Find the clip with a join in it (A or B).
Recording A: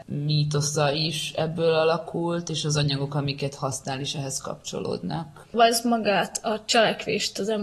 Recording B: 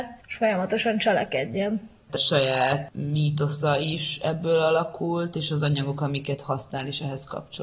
B